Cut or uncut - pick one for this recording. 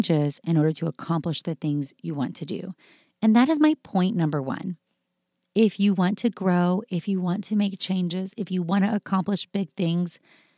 uncut